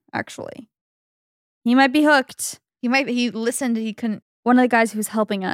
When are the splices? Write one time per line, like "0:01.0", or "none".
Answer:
0:01.6
0:04.2